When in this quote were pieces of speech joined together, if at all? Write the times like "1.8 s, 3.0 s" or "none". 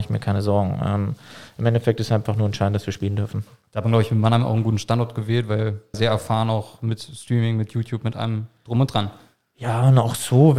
5.9 s